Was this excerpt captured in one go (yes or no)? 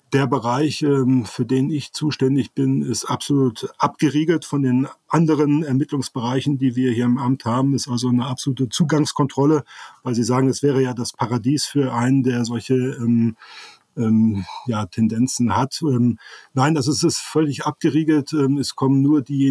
yes